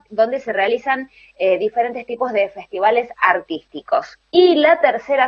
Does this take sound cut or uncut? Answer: uncut